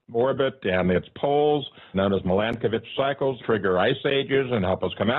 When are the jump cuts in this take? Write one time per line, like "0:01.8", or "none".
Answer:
0:01.9
0:03.4